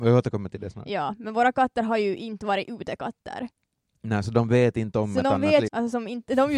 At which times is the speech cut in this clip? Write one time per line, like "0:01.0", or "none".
0:05.7